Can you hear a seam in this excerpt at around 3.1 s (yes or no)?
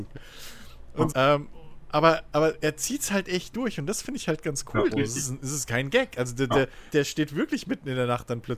no